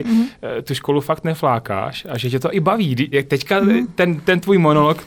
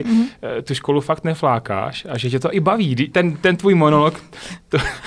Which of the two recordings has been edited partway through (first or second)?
second